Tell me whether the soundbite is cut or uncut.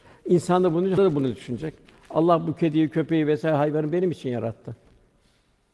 cut